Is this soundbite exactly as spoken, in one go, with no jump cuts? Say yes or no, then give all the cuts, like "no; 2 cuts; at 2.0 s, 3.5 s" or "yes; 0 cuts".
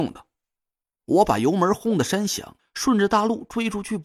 no; 2 cuts; at 1.0 s, 2.6 s